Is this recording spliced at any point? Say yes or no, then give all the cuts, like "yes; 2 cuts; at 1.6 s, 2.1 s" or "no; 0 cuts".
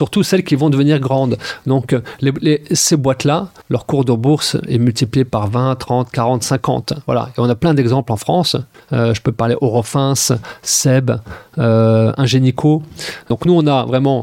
yes; 1 cut; at 3.6 s